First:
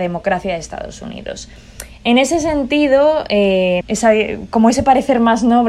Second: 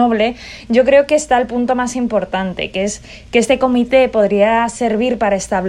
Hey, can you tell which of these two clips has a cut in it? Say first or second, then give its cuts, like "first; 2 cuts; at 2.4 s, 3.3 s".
first; 1 cut; at 3.8 s